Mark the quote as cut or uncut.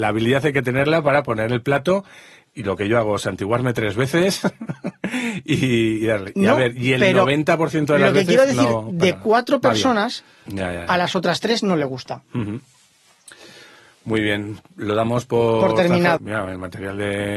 cut